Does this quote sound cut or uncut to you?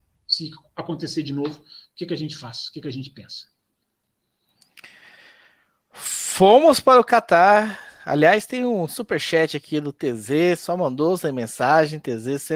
uncut